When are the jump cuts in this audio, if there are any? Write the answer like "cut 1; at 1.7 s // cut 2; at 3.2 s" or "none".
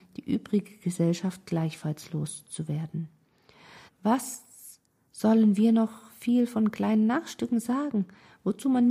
cut 1; at 3.9 s